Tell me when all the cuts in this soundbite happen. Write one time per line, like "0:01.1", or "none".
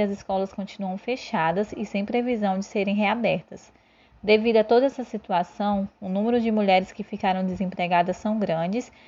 none